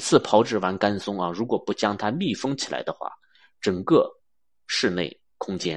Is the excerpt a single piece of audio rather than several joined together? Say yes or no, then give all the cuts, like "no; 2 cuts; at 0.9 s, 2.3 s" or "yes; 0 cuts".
yes; 0 cuts